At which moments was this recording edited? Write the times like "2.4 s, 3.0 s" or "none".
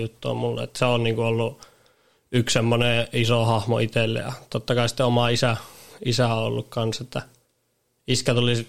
none